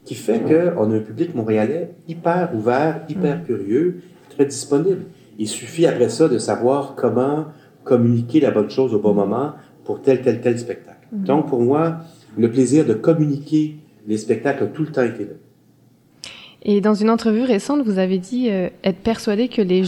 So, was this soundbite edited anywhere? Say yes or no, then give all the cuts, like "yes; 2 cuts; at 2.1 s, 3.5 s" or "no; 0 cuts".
no; 0 cuts